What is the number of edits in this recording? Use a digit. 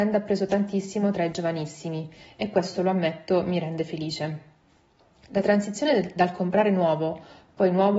0